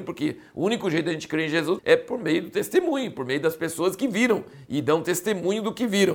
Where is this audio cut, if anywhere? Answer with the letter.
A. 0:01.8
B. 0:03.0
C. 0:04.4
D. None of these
A